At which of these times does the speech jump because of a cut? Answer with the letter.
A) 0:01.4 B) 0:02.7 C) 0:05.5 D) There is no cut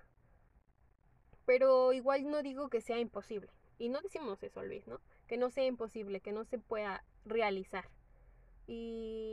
D